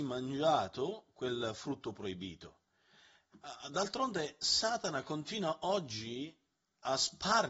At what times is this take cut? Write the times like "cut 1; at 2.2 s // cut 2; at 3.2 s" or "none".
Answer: none